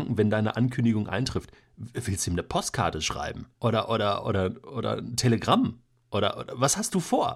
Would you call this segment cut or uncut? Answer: cut